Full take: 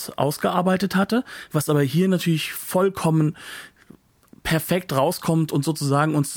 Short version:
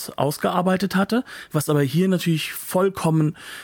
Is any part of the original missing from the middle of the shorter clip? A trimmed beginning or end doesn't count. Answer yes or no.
no